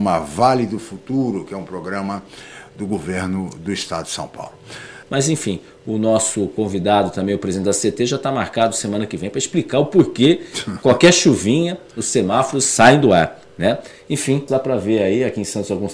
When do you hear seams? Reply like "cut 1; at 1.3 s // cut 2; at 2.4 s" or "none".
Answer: cut 1; at 5.0 s // cut 2; at 14.5 s